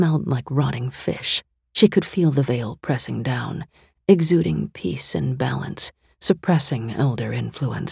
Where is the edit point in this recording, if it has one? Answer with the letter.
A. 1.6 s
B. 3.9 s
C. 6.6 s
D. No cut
A